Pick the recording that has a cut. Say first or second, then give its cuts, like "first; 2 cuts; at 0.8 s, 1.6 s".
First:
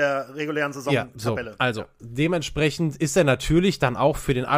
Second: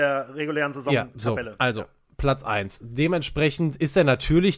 first; 1 cut; at 2.0 s